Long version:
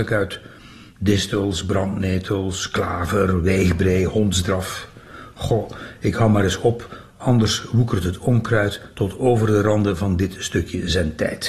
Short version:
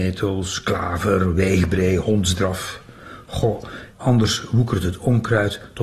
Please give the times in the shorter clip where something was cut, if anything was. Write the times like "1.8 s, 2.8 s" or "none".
3.9 s